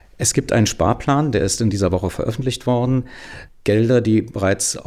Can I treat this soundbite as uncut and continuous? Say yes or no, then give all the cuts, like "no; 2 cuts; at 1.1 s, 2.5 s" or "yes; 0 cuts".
no; 1 cut; at 3.5 s